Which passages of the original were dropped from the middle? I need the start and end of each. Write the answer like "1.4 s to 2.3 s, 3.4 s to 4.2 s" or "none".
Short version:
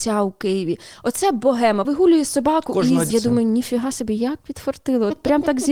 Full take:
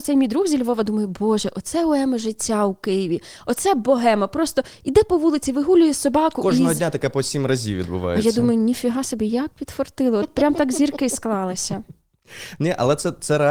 4.3 s to 5.5 s, 6.8 s to 8.2 s

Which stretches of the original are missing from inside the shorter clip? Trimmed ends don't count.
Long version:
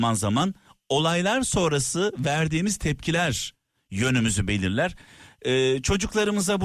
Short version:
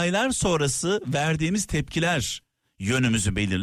none

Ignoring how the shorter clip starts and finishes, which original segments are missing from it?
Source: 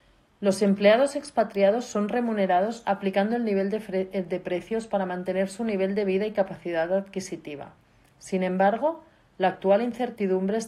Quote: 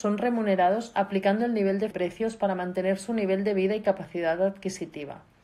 3.8 s to 4.4 s

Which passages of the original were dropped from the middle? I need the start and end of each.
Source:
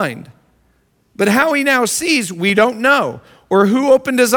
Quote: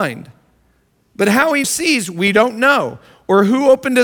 1.6 s to 1.9 s

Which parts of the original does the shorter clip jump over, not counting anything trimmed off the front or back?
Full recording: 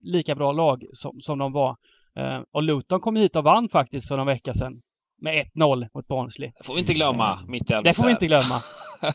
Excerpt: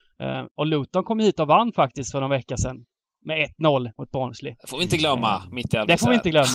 none

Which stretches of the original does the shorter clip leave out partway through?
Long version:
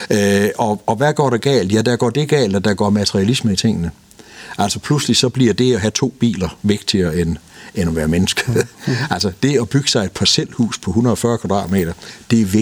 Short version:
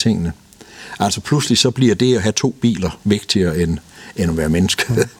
none

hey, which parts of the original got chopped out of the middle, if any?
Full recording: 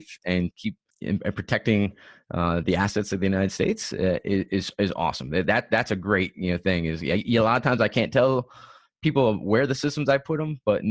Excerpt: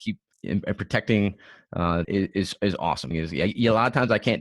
2.6 s to 4.2 s, 5.3 s to 6.8 s

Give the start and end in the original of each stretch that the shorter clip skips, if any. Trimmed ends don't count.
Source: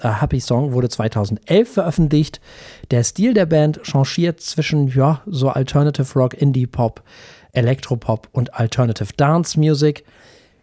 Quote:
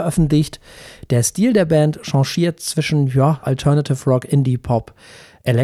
5.2 s to 5.5 s

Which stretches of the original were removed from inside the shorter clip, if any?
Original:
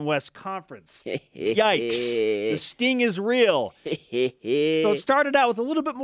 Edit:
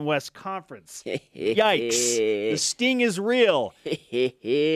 none

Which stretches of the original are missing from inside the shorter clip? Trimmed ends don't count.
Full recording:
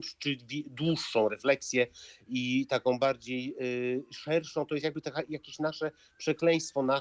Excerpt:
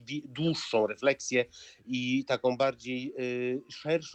none

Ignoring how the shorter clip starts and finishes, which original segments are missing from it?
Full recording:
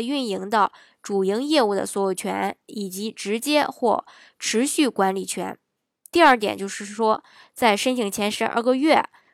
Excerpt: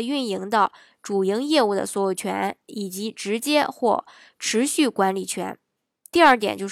none

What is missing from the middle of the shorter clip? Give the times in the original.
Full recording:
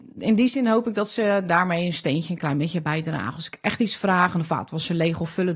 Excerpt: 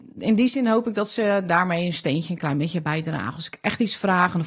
none

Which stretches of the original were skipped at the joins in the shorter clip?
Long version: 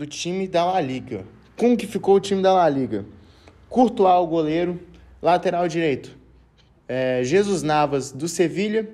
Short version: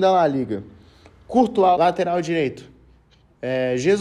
4.2 s to 5.2 s

